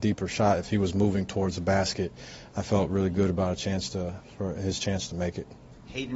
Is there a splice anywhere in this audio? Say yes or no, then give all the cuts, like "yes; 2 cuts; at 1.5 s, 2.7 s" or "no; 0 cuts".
no; 0 cuts